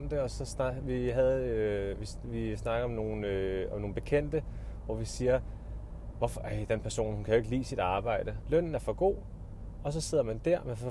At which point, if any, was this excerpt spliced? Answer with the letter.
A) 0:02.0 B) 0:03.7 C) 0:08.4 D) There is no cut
C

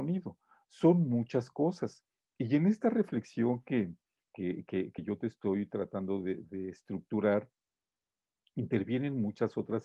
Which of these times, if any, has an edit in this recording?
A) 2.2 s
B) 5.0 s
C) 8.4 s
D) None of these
D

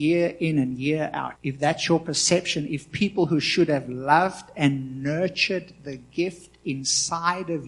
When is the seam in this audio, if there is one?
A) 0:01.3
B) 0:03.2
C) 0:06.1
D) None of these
A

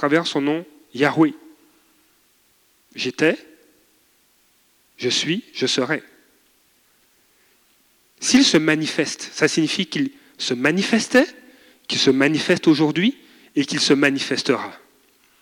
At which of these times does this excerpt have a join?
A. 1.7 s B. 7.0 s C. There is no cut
C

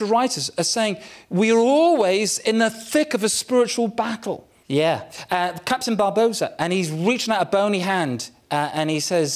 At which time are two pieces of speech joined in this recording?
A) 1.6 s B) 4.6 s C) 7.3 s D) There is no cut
B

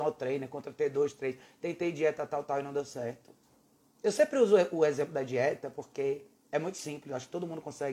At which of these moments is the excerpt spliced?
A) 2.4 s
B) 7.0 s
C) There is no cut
A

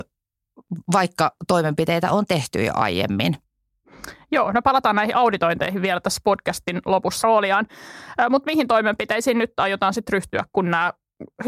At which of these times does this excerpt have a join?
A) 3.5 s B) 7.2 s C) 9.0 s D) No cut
B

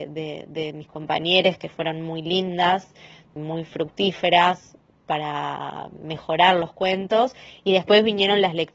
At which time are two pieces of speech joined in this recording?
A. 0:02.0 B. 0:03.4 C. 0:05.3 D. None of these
B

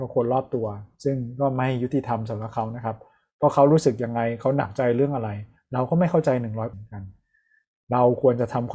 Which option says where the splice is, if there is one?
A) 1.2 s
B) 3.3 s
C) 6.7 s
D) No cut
C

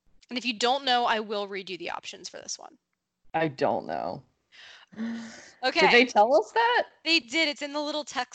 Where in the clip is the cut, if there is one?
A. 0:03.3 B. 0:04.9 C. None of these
B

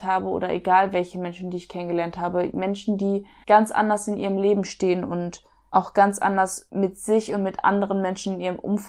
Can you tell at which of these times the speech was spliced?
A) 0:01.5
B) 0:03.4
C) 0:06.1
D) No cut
B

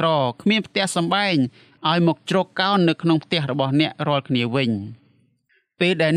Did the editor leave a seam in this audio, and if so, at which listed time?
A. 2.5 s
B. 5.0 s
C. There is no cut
C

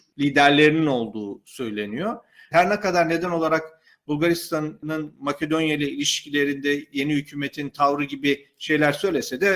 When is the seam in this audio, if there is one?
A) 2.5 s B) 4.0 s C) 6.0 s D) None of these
A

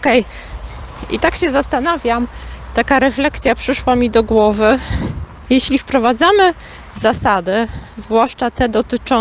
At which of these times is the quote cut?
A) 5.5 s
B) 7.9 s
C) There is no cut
A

